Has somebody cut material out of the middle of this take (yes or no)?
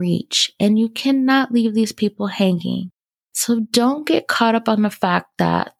yes